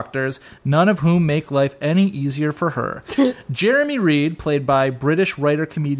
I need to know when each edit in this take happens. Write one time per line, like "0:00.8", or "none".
none